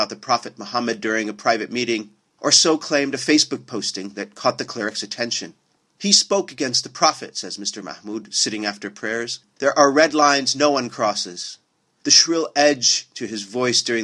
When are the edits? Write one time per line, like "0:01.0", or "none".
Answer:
none